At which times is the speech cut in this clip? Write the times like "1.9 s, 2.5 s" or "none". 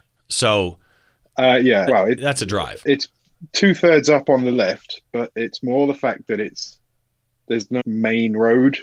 1.9 s, 7.8 s

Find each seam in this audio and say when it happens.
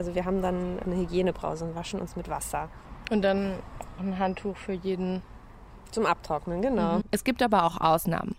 4.0 s, 7.0 s

